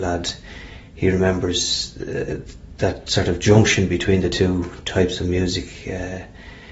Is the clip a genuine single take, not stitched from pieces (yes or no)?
yes